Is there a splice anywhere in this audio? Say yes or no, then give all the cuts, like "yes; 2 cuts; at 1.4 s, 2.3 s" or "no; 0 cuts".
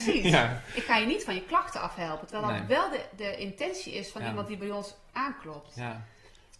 no; 0 cuts